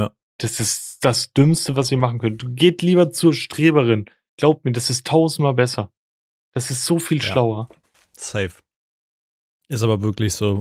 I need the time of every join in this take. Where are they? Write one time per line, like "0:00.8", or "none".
none